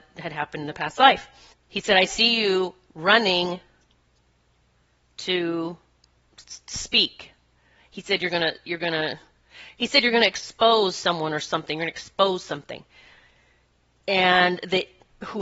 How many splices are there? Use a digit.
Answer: 1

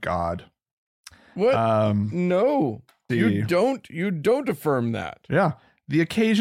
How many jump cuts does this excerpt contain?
1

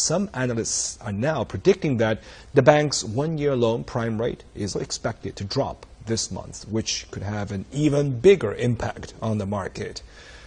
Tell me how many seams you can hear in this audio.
1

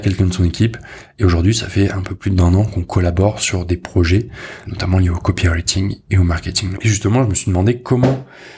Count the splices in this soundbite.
2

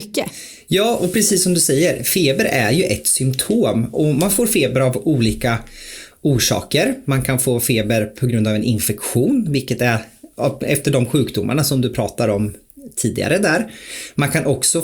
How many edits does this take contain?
0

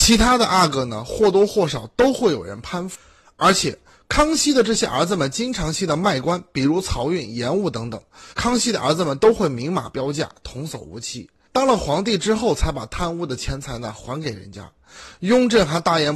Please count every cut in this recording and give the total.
2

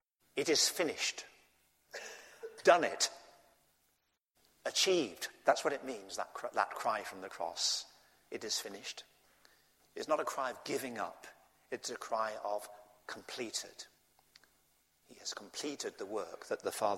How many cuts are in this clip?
1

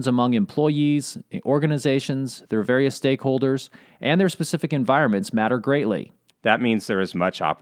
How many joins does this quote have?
1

